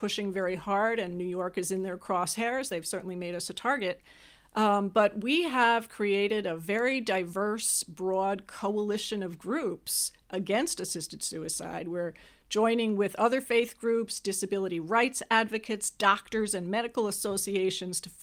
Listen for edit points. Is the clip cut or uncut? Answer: uncut